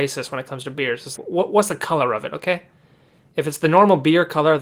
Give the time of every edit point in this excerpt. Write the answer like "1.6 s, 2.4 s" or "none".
1.2 s